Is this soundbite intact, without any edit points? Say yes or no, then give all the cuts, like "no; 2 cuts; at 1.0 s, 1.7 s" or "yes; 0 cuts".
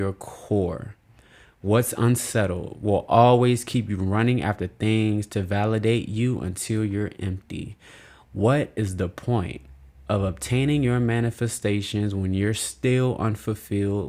yes; 0 cuts